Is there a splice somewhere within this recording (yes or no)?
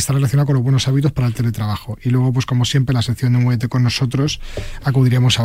no